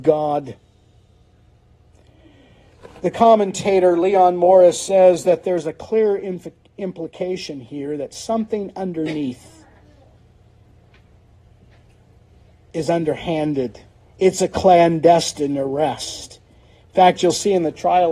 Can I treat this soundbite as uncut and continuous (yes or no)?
yes